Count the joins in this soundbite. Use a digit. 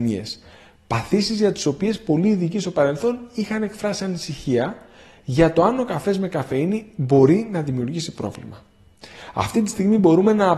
0